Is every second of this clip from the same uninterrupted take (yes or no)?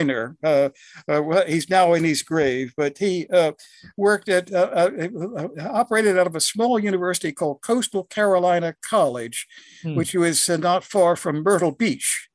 yes